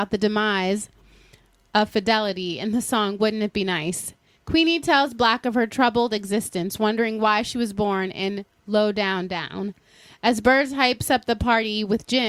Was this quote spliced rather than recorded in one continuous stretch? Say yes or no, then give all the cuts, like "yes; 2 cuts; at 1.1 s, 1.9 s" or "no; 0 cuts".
no; 0 cuts